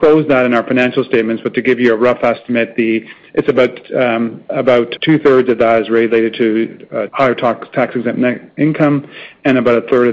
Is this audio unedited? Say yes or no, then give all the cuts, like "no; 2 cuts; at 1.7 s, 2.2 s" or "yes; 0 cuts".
no; 2 cuts; at 5.0 s, 7.1 s